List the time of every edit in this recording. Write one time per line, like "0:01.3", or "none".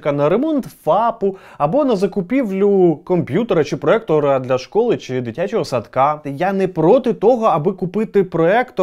0:06.2